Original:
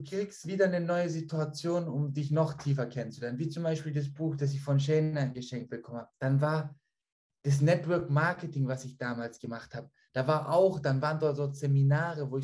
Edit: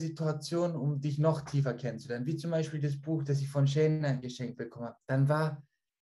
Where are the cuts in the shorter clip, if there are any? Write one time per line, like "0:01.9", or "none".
none